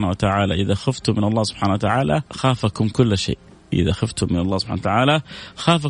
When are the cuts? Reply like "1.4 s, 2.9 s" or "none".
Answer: 2.3 s